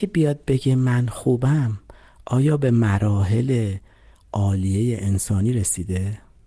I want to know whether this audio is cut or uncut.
uncut